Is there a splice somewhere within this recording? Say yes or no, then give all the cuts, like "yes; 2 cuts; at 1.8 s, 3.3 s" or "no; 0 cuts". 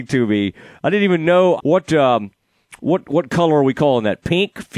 yes; 1 cut; at 1.6 s